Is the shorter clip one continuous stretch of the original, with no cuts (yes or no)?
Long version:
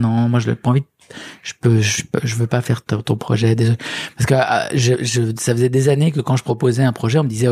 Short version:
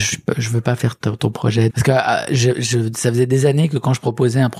no